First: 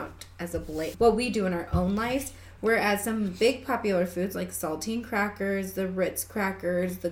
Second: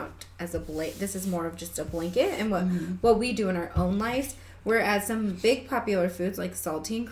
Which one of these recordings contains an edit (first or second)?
first